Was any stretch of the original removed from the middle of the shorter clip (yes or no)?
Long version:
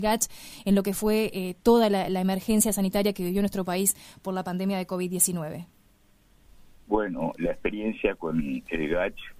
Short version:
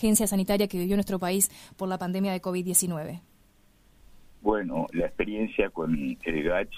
no